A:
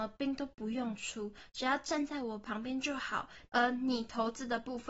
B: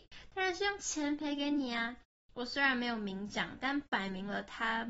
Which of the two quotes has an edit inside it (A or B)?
A